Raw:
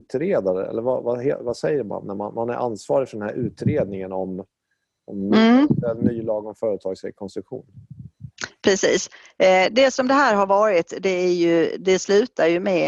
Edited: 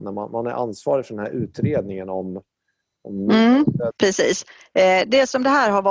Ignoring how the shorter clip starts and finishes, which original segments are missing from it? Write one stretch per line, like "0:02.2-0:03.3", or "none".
0:05.9-0:08.5